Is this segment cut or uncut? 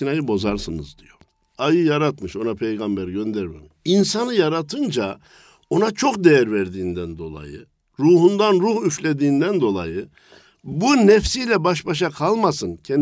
cut